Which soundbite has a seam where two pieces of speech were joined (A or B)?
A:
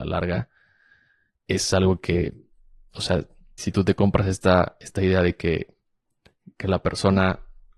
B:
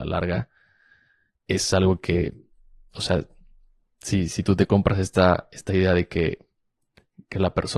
A